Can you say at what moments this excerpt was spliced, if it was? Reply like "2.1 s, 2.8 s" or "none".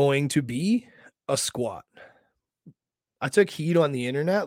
3.1 s